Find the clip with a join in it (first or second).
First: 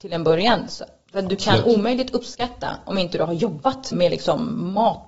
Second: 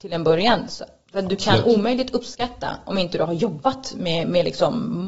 first